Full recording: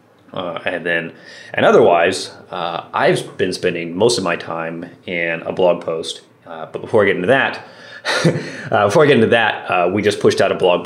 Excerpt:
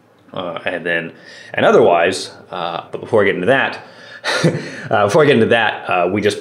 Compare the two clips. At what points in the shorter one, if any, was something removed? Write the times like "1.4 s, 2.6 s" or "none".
2.9 s